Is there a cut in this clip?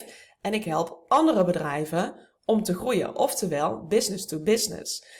no; 0 cuts

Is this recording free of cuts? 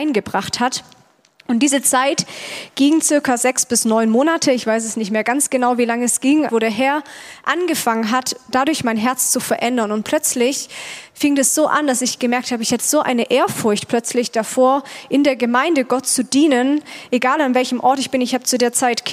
no; 1 cut; at 6.5 s

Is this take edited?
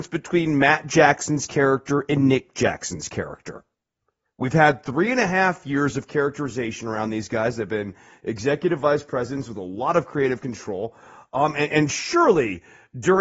no; 0 cuts

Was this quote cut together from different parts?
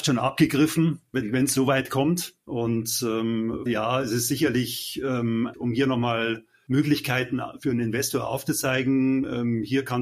yes; 3 cuts; at 2.4 s, 3.7 s, 5.5 s

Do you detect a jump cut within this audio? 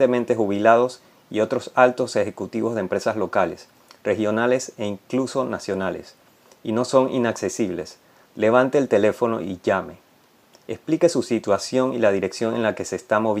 yes; 1 cut; at 8.3 s

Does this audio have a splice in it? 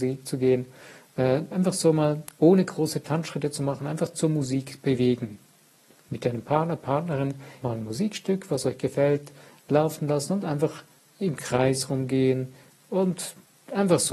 yes; 1 cut; at 7.6 s

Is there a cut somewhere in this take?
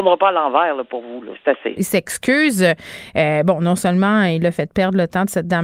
yes; 1 cut; at 1.8 s

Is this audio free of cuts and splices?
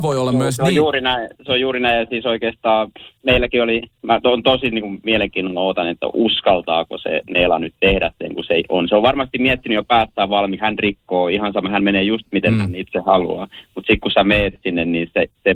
no; 1 cut; at 10.6 s

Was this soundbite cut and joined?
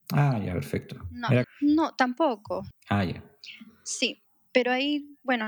yes; 2 cuts; at 1.4 s, 2.7 s

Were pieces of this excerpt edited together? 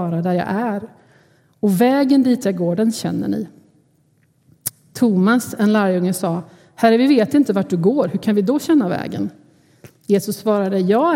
no; 0 cuts

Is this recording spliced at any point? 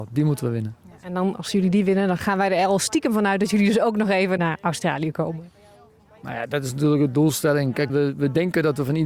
yes; 1 cut; at 7.9 s

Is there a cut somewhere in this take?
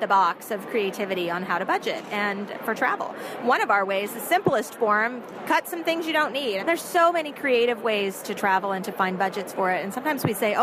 yes; 2 cuts; at 6.6 s, 8.2 s

